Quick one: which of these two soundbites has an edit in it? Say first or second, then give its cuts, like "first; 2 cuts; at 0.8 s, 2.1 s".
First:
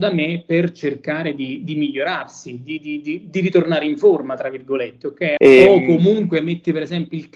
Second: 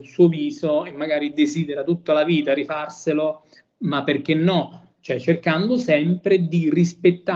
first; 1 cut; at 5.4 s